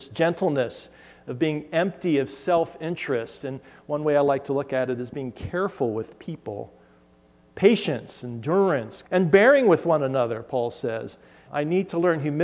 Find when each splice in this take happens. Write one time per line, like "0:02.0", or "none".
0:09.0
0:11.5